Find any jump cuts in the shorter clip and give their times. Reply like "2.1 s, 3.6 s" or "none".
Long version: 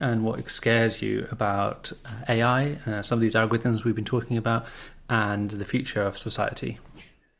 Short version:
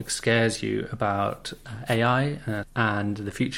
2.6 s